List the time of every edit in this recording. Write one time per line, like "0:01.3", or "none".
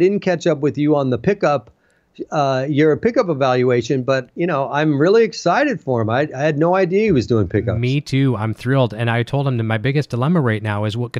none

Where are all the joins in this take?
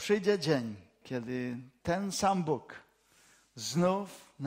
0:01.0

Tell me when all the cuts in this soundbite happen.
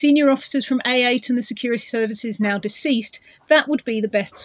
none

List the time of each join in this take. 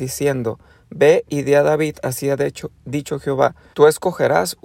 0:03.7

